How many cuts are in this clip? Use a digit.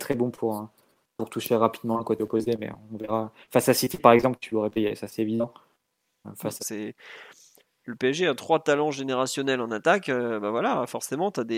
1